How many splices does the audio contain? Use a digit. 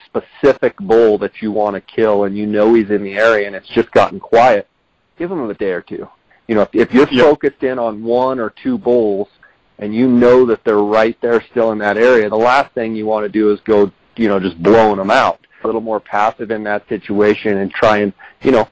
2